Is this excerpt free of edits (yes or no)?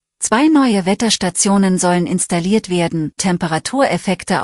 no